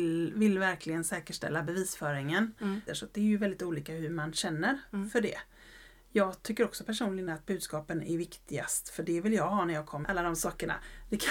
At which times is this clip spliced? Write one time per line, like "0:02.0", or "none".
0:02.9
0:10.0